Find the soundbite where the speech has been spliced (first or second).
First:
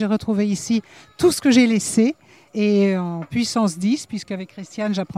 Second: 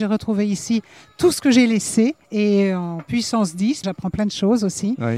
second